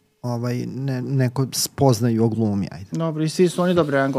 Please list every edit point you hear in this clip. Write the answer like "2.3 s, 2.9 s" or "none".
1.0 s